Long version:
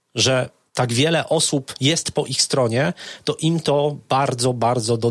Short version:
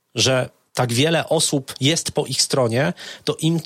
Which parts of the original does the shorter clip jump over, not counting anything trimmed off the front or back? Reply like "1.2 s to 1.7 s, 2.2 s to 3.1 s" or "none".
none